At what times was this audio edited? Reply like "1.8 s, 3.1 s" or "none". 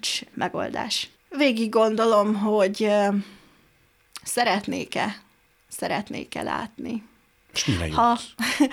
1.2 s